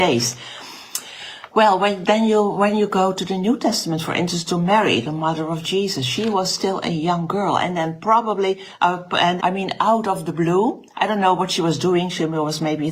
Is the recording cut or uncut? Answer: cut